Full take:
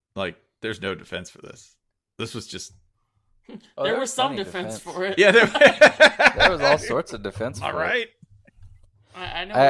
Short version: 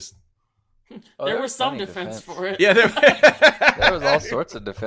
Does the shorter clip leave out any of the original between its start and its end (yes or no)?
no